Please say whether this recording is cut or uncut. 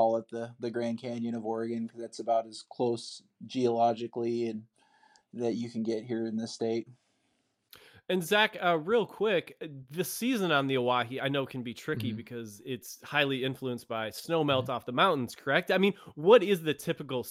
uncut